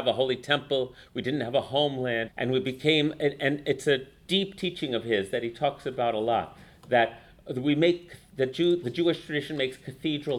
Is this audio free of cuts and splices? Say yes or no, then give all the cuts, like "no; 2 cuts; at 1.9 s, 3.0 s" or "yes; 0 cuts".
no; 2 cuts; at 2.3 s, 8.8 s